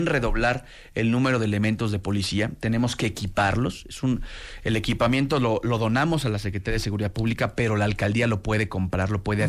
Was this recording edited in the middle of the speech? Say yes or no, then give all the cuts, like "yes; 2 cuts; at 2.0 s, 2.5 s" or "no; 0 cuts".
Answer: no; 0 cuts